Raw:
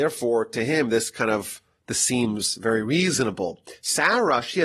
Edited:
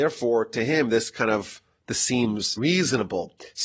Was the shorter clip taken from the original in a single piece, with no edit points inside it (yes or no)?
no